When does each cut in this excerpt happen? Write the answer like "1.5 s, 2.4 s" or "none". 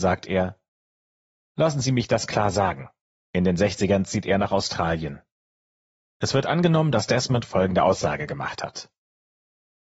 3.1 s, 6.1 s